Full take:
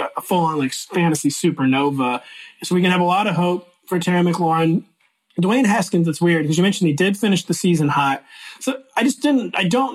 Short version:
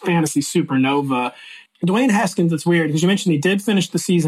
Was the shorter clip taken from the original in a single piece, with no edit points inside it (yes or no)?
no